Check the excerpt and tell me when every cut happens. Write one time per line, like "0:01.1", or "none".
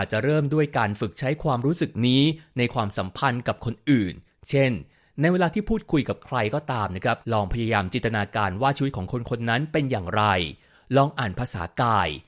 0:07.2